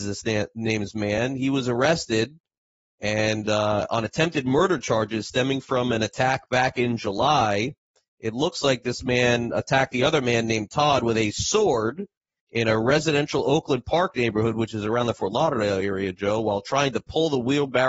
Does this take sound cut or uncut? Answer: uncut